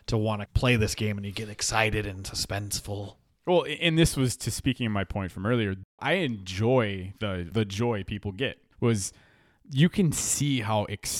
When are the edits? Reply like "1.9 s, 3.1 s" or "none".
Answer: 7.5 s, 8.7 s